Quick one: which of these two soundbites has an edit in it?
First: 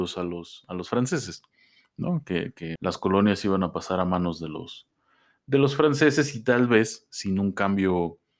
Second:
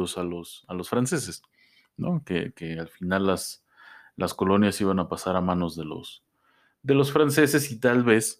first; 1 cut; at 2.8 s

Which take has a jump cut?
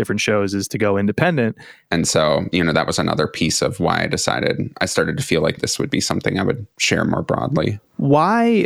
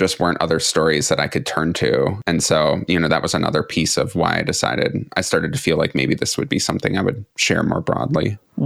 first; 2 cuts; at 1.9 s, 5.6 s

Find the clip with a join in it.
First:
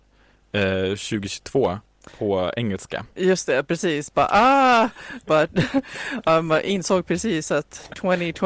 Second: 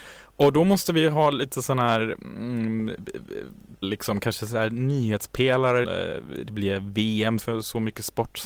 second; 3 cuts; at 3.8 s, 5.8 s, 7.4 s

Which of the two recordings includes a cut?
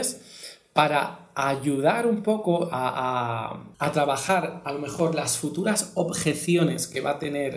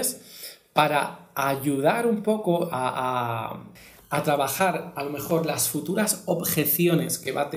first; 1 cut; at 3.7 s

